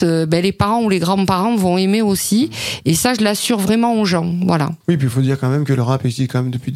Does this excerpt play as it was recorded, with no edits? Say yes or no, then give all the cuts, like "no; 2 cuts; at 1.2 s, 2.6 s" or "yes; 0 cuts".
no; 1 cut; at 4.8 s